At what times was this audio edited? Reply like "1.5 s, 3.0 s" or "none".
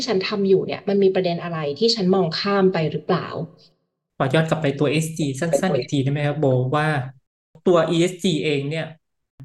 none